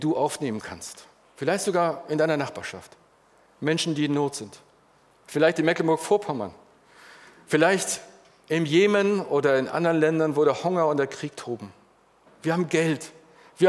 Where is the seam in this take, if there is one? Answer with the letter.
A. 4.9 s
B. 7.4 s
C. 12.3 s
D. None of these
C